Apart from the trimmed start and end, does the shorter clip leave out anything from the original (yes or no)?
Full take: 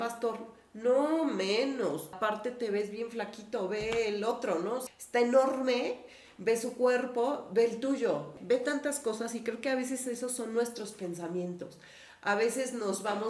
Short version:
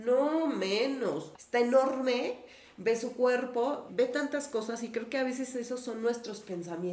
yes